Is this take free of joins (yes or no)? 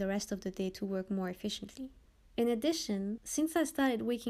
yes